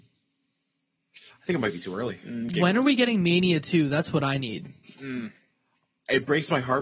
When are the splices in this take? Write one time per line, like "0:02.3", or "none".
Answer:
none